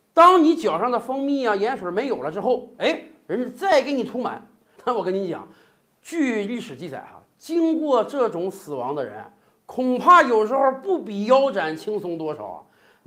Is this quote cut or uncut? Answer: cut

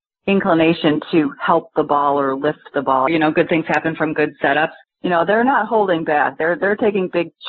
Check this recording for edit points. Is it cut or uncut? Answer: cut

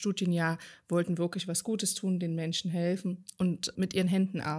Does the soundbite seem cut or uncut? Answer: uncut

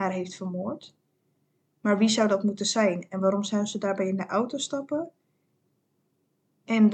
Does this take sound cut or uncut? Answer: uncut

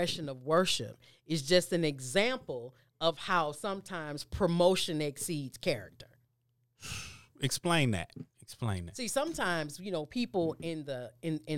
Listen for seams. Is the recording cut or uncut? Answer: uncut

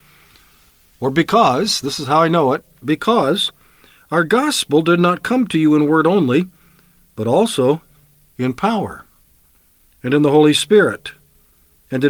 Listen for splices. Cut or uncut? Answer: uncut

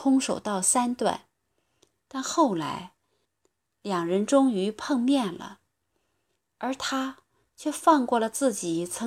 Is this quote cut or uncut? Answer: cut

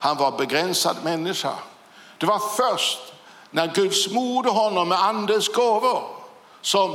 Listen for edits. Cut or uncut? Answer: uncut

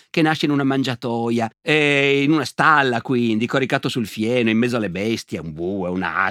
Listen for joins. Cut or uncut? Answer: uncut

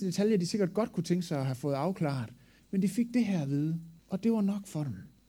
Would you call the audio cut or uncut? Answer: cut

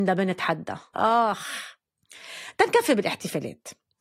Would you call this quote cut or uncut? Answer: cut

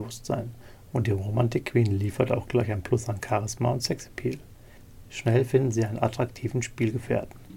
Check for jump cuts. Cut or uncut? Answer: cut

